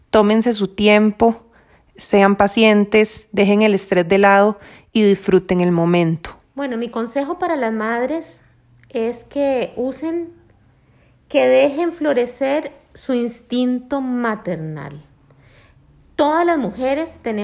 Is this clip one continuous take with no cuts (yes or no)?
no